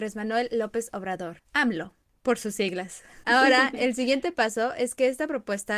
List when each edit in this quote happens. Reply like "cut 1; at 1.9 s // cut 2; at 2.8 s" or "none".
cut 1; at 3.2 s